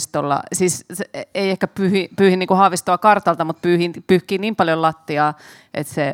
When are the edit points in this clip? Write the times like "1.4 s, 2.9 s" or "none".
none